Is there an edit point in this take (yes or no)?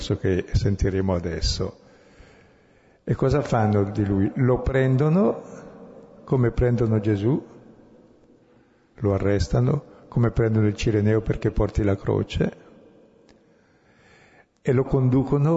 no